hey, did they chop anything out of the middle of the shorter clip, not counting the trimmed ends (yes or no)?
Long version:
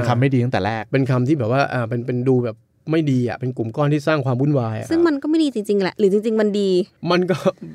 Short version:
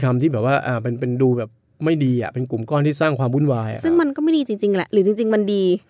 no